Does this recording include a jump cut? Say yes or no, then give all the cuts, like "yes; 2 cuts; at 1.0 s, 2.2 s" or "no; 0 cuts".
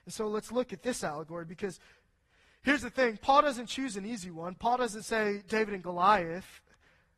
no; 0 cuts